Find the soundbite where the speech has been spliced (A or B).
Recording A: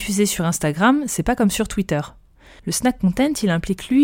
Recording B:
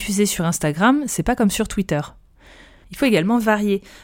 A